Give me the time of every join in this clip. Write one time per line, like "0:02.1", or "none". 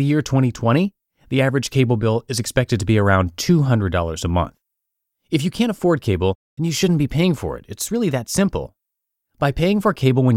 none